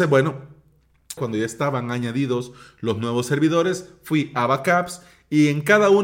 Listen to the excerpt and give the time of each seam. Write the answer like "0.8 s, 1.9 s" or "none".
1.2 s